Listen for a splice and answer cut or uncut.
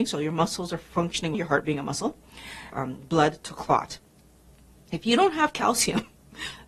cut